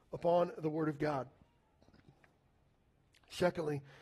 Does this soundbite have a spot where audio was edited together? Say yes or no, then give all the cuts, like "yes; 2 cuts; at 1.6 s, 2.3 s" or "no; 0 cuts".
no; 0 cuts